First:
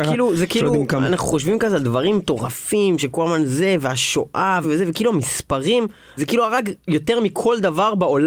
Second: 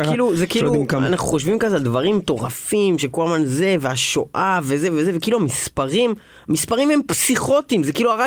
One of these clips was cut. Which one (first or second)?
first